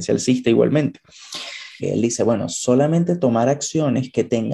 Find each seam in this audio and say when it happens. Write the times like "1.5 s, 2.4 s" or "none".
1.8 s